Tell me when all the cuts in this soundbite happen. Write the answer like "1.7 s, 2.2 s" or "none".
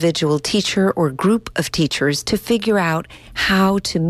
2.2 s